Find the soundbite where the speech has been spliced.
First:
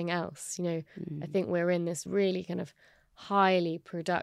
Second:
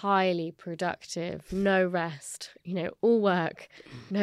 first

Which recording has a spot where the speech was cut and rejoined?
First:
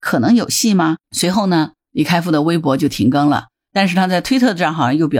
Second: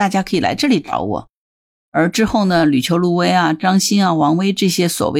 first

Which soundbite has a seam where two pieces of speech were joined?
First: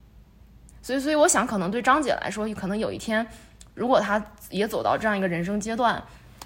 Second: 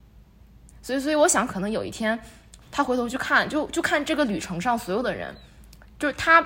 second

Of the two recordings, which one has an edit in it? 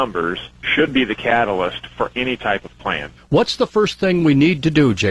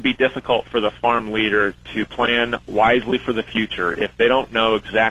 first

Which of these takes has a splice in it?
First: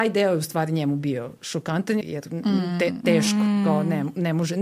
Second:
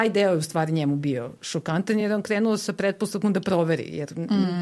first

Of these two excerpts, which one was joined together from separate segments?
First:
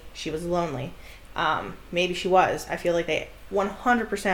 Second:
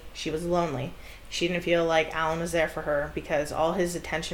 first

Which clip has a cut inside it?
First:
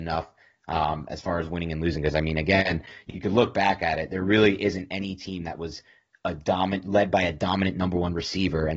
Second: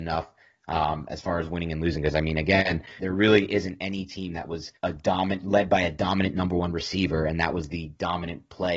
second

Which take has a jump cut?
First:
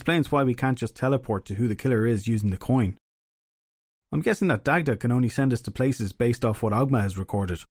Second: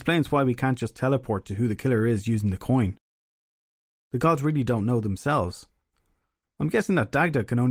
first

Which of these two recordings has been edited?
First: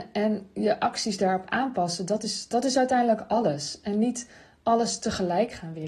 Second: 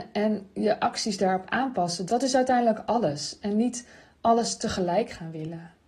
second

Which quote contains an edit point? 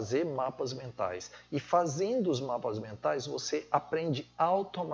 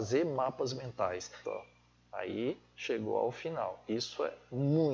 second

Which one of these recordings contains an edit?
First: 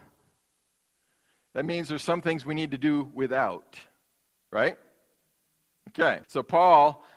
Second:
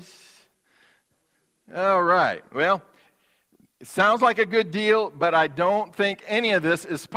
first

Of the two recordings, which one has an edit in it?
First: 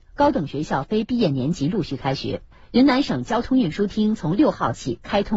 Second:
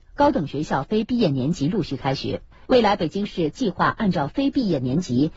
second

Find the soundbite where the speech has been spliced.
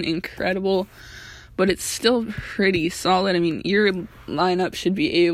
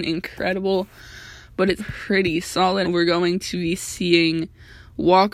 second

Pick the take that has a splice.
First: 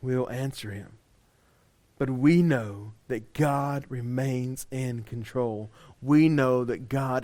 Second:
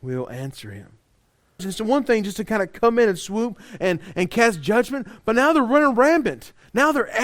second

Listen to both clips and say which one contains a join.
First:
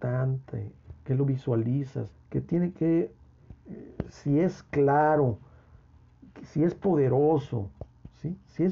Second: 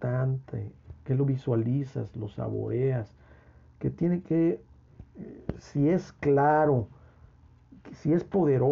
first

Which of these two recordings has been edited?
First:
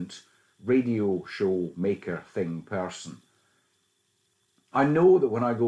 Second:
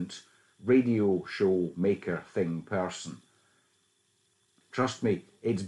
second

